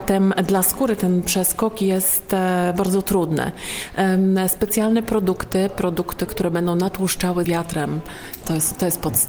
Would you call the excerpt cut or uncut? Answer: cut